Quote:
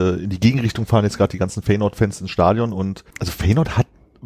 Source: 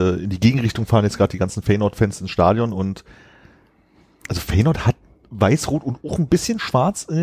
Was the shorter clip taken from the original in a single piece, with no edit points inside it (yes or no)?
no